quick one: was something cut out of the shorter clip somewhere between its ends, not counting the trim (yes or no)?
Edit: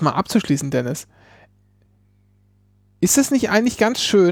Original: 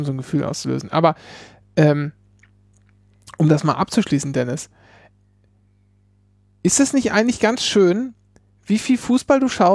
no